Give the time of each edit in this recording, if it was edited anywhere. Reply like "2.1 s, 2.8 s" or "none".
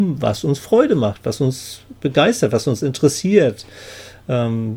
none

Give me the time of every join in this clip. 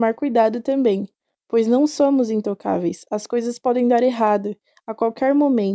none

